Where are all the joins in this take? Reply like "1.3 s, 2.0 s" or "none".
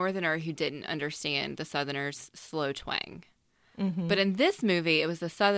none